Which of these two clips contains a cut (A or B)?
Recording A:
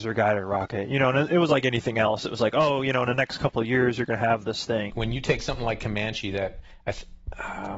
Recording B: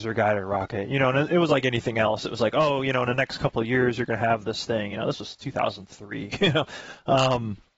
A